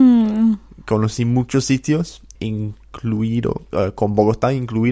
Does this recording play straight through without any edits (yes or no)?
no